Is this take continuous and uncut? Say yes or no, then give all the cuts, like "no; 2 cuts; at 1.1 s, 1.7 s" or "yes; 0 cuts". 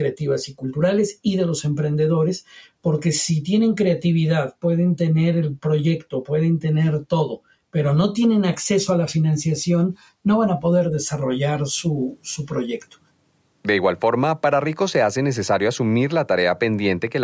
yes; 0 cuts